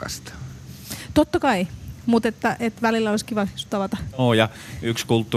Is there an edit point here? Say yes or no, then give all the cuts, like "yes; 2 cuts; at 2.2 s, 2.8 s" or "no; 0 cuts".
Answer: no; 0 cuts